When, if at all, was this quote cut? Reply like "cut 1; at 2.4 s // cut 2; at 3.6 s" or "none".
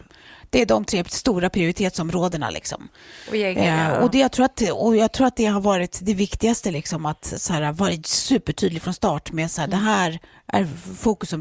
none